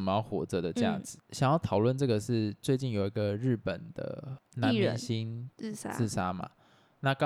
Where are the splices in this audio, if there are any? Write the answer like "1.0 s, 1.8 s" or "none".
1.2 s, 4.4 s